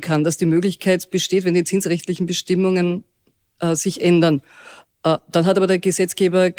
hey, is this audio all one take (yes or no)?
yes